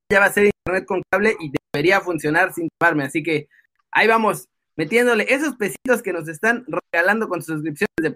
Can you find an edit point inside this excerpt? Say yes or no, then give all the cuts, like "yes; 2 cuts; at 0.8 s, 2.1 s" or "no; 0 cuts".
no; 0 cuts